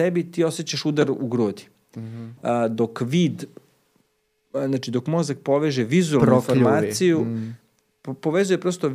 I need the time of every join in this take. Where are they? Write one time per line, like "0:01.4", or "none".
0:02.4